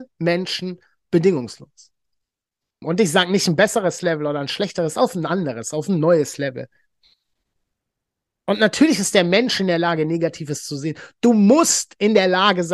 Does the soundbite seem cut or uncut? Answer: cut